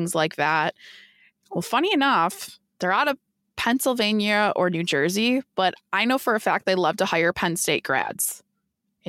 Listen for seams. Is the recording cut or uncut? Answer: cut